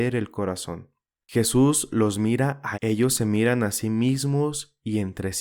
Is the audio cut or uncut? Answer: cut